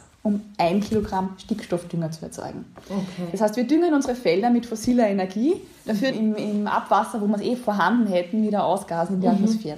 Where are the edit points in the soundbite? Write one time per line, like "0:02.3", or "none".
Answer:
0:06.1